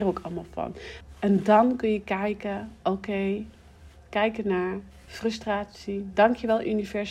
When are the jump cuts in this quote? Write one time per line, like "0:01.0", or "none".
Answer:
0:01.0